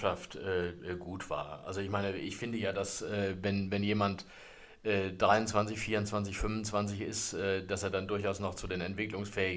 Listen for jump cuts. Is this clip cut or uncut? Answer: uncut